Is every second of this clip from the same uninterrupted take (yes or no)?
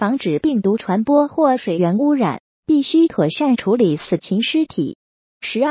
yes